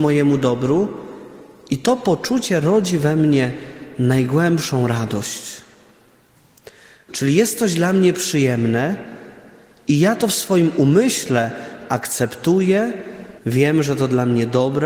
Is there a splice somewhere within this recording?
yes; 2 cuts; at 7.1 s, 13.4 s

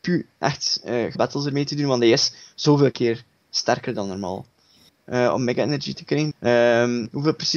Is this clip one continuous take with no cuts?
no; 3 cuts; at 1.1 s, 4.9 s, 6.3 s

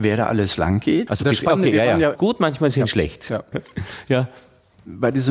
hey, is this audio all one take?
no; 3 cuts; at 1.1 s, 2.1 s, 3.5 s

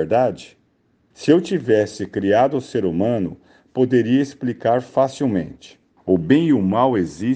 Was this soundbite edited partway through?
yes; 2 cuts; at 1.1 s, 6.0 s

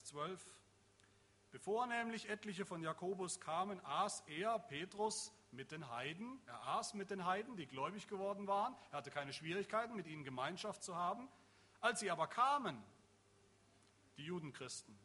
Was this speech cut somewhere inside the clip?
no; 0 cuts

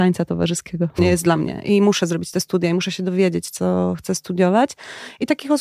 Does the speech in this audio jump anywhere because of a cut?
yes; 1 cut; at 1.0 s

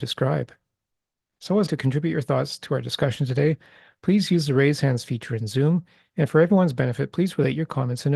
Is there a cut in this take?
yes; 1 cut; at 1.7 s

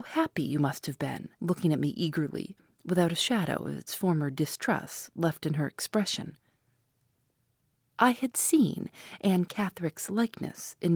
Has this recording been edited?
yes; 2 cuts; at 1.4 s, 7.8 s

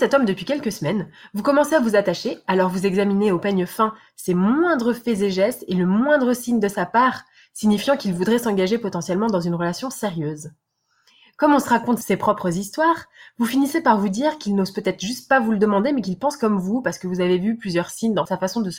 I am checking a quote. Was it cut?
no; 0 cuts

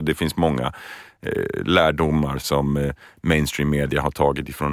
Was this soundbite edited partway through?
yes; 1 cut; at 2.4 s

